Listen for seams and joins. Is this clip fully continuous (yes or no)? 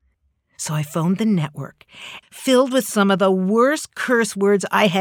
no